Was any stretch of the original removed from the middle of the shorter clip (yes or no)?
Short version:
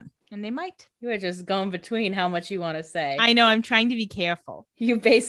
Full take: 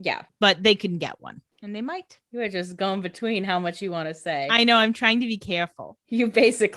no